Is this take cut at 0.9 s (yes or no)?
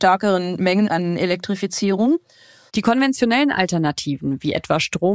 no